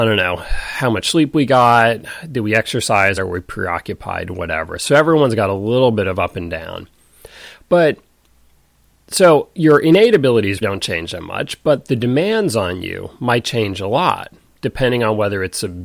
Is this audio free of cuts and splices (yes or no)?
no